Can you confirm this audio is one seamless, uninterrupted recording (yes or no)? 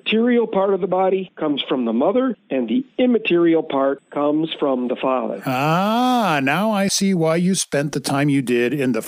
no